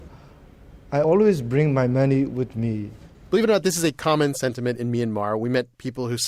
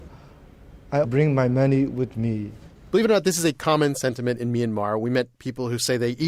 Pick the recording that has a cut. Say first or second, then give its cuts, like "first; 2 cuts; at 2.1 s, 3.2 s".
second; 1 cut; at 1.0 s